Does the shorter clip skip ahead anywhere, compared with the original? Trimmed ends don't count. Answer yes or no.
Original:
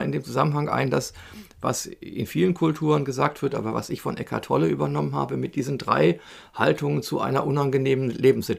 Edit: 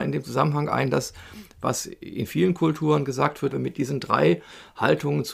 yes